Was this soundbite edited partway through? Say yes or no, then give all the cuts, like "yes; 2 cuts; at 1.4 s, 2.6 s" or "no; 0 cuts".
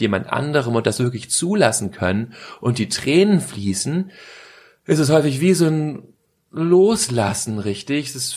no; 0 cuts